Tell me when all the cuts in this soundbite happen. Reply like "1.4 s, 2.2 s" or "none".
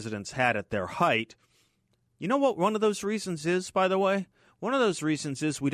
none